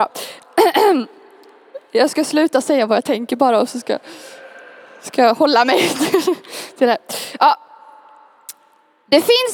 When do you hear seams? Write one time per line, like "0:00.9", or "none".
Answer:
none